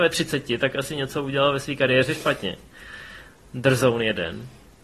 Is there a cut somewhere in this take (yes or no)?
no